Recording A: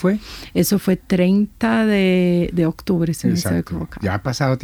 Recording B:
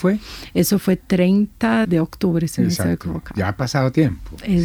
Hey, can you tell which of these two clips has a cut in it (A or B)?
B